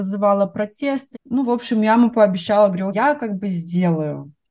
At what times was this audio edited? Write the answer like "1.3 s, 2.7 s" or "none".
1.1 s, 2.9 s